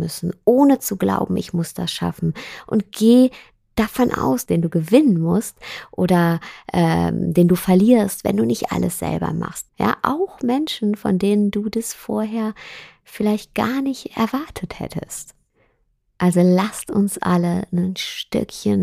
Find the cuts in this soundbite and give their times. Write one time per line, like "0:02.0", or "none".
0:04.5
0:09.7